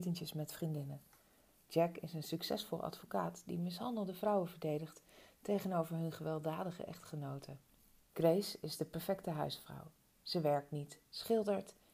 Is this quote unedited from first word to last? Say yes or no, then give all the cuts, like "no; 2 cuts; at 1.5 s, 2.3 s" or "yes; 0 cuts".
no; 1 cut; at 8.0 s